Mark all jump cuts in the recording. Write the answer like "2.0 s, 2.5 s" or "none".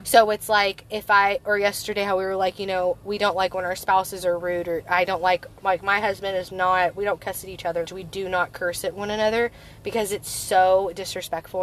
7.8 s

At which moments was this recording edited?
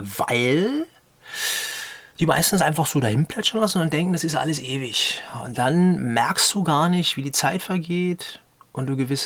none

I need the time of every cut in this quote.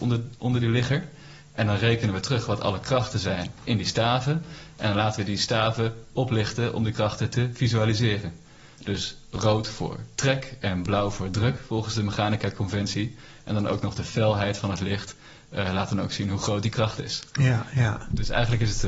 none

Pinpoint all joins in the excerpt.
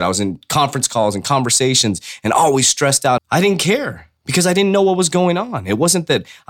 3.2 s

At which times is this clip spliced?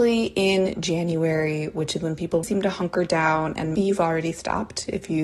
2.4 s, 3.8 s

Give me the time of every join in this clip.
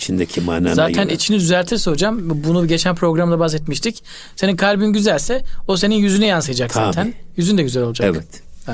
none

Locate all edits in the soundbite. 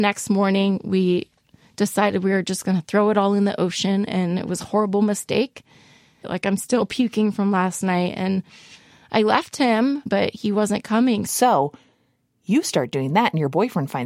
6.2 s, 10.1 s, 11.3 s

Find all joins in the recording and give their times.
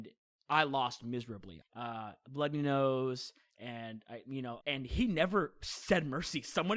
1.6 s, 4.6 s

